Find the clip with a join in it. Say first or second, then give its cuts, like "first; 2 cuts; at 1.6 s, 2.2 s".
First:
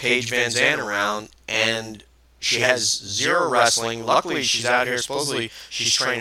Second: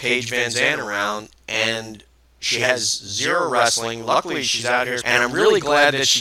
second; 1 cut; at 5.0 s